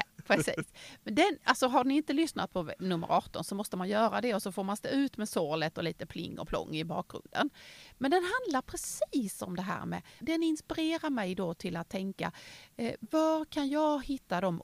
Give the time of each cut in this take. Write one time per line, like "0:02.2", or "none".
0:10.2